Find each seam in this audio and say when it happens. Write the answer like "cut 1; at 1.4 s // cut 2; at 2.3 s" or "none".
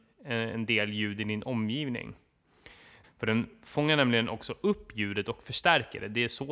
cut 1; at 3.0 s